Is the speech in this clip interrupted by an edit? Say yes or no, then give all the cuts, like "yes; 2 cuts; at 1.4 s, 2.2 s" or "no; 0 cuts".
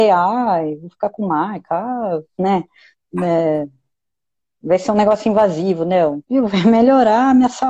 yes; 1 cut; at 6.2 s